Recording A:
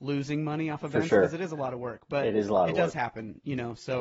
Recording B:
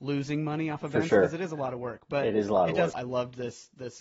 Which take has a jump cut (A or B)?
B